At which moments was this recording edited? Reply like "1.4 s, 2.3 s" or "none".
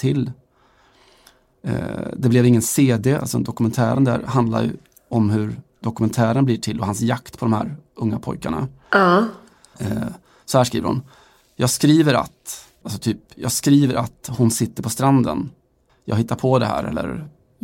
9.7 s, 12.8 s, 15.9 s